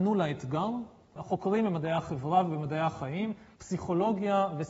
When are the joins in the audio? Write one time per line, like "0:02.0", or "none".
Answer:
0:01.2
0:03.5